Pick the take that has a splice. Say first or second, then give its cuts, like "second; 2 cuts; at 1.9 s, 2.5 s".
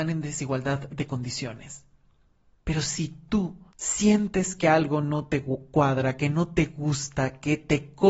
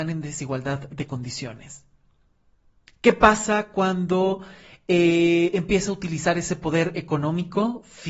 first; 2 cuts; at 2.6 s, 3.7 s